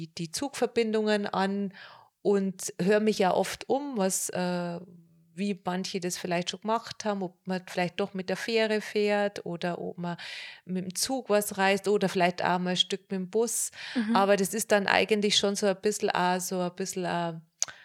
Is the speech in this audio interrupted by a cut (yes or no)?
no